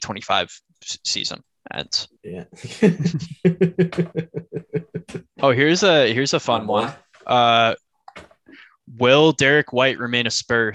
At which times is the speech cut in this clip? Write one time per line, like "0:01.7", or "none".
0:02.2